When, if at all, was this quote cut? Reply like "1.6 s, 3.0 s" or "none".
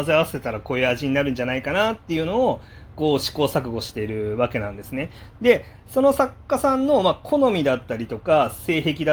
none